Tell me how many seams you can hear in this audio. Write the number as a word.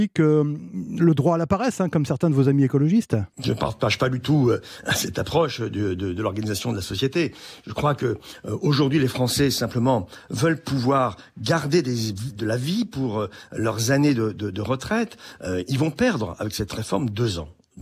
one